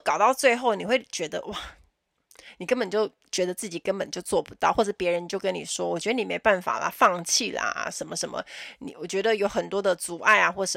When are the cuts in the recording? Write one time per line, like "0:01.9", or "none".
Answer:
none